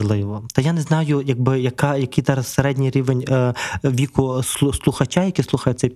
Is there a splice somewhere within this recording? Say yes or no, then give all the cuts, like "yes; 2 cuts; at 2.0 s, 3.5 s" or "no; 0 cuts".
no; 0 cuts